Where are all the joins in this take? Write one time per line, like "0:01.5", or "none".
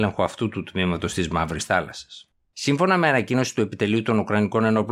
0:02.5